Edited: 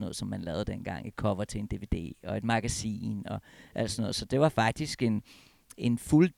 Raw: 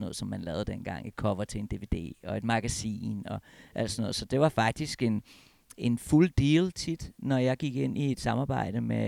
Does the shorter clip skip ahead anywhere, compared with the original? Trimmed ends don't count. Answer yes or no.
no